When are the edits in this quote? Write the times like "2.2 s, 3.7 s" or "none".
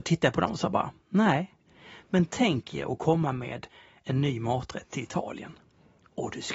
none